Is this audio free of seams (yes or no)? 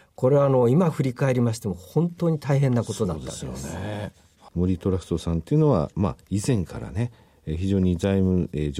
yes